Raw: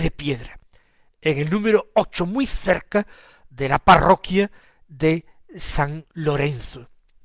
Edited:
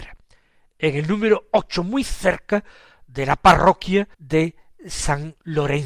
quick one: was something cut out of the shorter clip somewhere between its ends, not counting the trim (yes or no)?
yes